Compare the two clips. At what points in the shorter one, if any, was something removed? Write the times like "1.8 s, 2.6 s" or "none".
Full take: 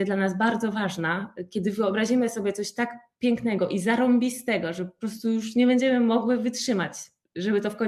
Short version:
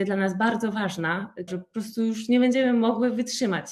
1.5 s

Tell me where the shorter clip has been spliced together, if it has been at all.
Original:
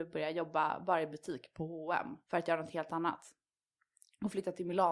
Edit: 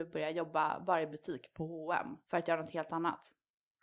none

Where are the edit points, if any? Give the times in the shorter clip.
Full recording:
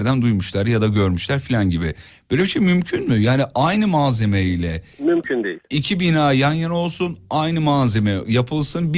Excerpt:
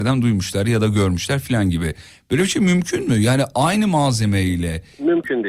none

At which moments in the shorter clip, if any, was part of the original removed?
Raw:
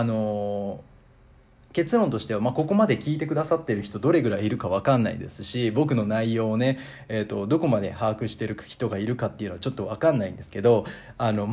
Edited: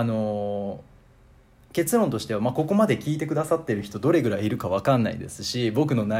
none

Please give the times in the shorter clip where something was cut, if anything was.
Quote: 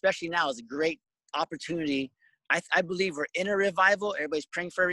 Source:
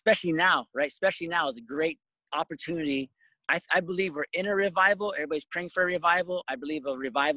none

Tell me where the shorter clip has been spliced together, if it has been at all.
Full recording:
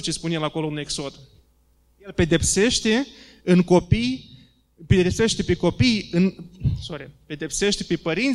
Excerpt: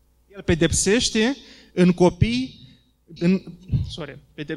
3.2 s

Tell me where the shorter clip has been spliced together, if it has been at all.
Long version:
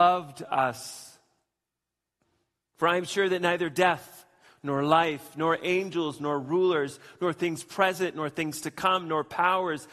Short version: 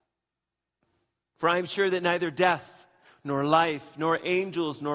none

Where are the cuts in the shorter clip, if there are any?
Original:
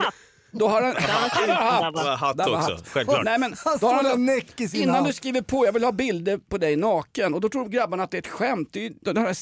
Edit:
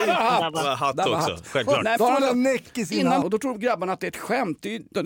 2.0 s, 3.2 s

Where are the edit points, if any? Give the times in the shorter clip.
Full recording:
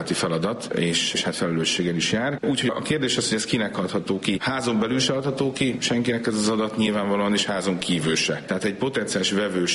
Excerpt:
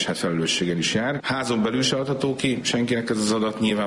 1.2 s

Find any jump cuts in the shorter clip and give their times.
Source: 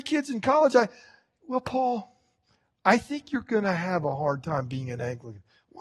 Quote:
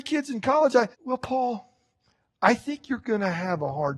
0.9 s

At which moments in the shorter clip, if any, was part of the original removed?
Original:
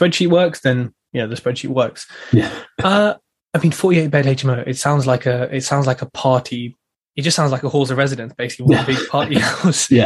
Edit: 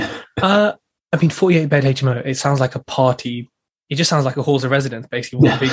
2.2 s

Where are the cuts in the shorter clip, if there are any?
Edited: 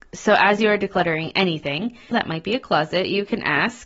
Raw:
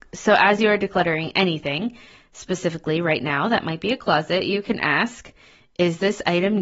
2.1 s

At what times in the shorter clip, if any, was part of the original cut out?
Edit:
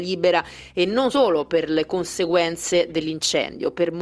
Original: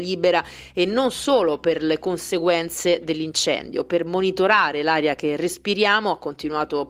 1.1 s

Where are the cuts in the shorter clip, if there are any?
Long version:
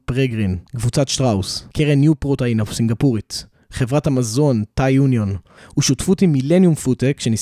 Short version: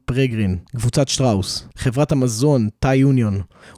1.7 s

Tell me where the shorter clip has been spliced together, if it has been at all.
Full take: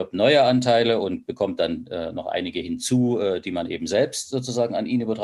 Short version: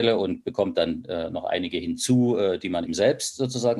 2.9 s

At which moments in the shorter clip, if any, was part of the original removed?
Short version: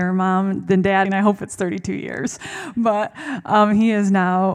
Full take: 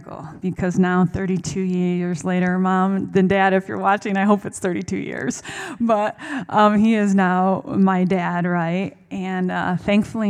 1.0 s

